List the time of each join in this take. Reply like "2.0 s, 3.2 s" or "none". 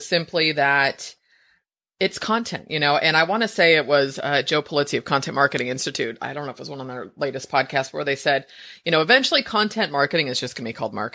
none